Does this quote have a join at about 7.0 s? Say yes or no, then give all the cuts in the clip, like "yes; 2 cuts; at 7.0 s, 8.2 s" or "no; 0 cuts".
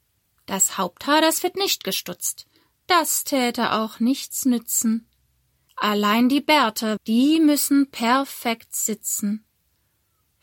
yes; 2 cuts; at 5.7 s, 7.0 s